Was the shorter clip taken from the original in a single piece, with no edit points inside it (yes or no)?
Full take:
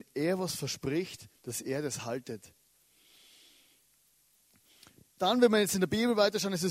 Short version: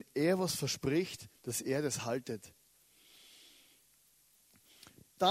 yes